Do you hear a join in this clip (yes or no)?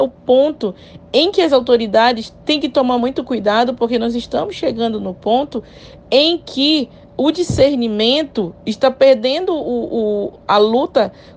no